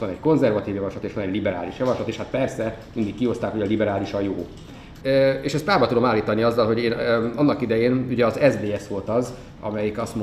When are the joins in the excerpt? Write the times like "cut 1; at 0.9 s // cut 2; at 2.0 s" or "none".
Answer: cut 1; at 5.0 s